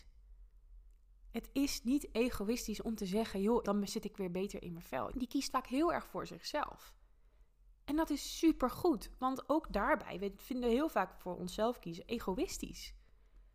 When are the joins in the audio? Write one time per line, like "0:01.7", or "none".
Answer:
0:03.6
0:05.1